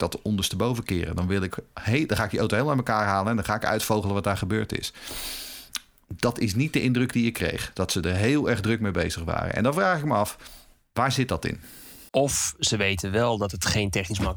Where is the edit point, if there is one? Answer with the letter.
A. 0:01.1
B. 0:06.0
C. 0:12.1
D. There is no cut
C